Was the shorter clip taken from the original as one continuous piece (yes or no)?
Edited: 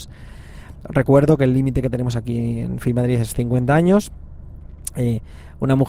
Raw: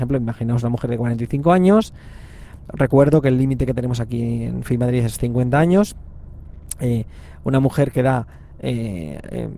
yes